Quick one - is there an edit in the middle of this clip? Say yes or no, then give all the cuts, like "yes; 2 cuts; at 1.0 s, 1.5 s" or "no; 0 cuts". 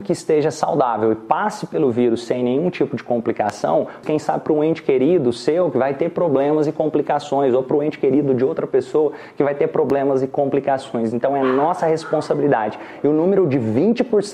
yes; 1 cut; at 4.0 s